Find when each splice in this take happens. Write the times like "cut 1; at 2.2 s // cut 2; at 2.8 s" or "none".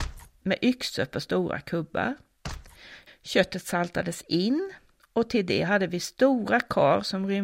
cut 1; at 3.1 s

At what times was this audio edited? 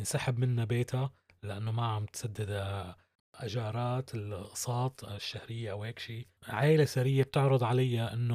cut 1; at 6.4 s

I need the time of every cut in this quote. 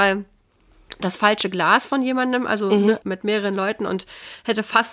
cut 1; at 3.0 s

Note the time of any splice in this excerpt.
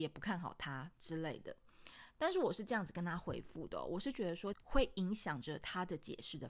cut 1; at 4.5 s

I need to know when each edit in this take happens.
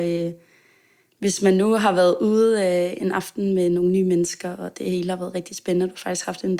none

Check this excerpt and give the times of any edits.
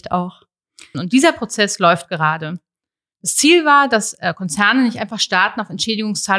cut 1; at 0.9 s // cut 2; at 3.0 s

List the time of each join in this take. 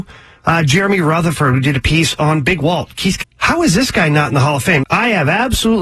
cut 1; at 3.2 s // cut 2; at 4.8 s

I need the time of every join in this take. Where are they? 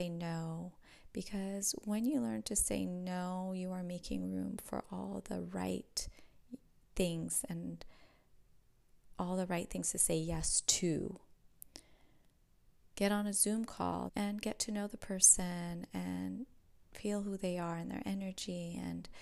cut 1; at 12.9 s // cut 2; at 14.1 s

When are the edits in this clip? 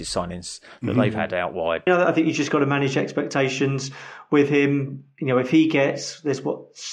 cut 1; at 1.9 s

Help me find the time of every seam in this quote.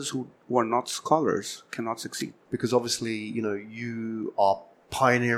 cut 1; at 2.5 s

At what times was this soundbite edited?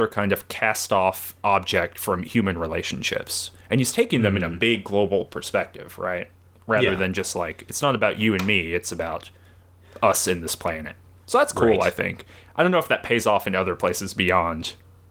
none

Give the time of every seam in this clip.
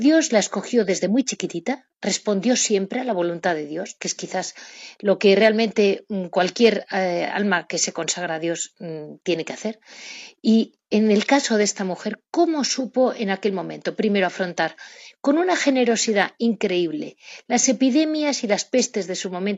none

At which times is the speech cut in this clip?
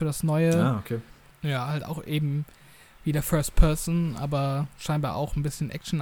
cut 1; at 1.3 s

